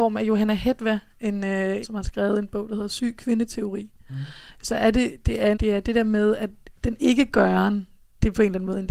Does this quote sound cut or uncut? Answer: cut